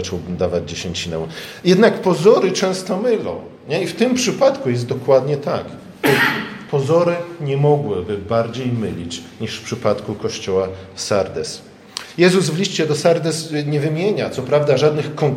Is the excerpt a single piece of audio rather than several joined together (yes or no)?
yes